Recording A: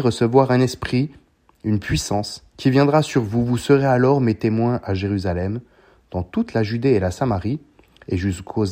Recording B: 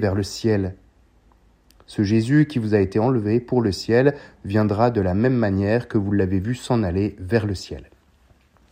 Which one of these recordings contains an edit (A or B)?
A